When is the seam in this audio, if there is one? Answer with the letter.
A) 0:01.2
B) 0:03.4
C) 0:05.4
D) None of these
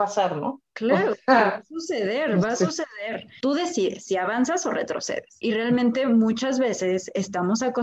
B